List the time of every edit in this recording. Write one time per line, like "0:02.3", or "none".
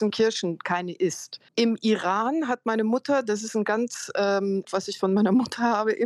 0:01.5
0:04.6